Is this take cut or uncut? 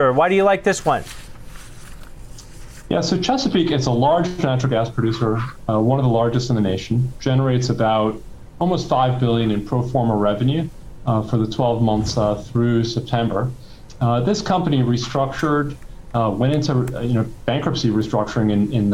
uncut